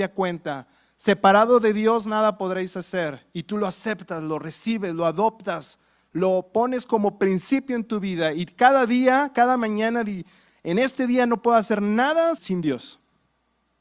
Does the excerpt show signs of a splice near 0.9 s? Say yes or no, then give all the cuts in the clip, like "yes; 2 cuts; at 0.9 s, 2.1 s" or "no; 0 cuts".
no; 1 cut; at 12.4 s